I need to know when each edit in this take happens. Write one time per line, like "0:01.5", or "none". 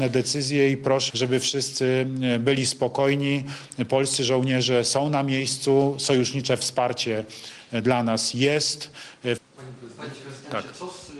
0:01.1
0:09.4